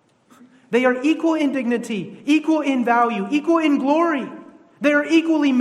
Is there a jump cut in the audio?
no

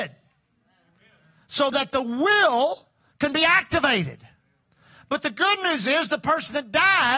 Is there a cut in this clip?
no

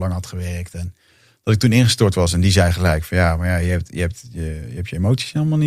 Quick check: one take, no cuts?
yes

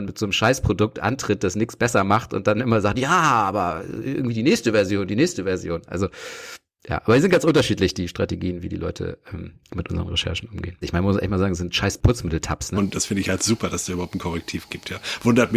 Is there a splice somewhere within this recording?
yes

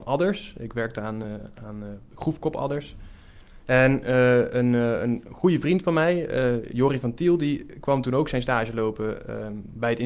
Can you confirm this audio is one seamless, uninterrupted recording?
yes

